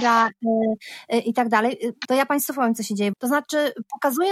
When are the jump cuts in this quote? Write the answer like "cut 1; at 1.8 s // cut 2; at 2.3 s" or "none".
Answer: cut 1; at 2.0 s // cut 2; at 3.1 s